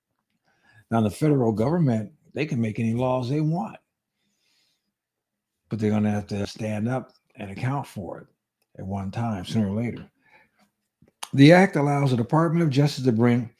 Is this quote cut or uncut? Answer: cut